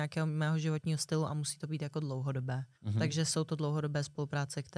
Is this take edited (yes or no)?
yes